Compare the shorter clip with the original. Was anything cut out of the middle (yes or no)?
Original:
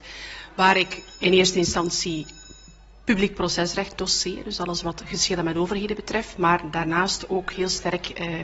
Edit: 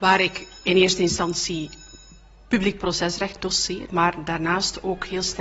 yes